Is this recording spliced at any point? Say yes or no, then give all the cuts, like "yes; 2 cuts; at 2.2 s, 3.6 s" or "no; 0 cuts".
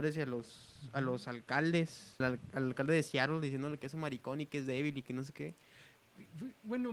yes; 1 cut; at 2.2 s